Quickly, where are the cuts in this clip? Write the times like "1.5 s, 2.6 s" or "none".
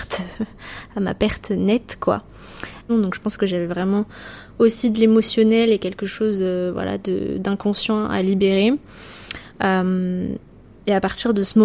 2.9 s